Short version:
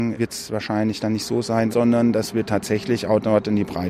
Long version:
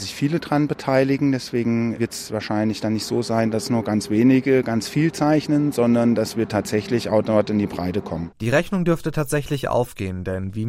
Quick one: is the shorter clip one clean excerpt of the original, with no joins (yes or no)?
no